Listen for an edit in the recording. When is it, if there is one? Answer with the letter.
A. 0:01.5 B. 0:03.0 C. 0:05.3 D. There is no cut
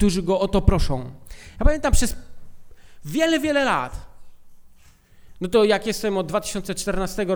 D